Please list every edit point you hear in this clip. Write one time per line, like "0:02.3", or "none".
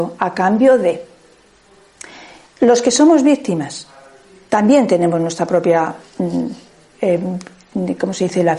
none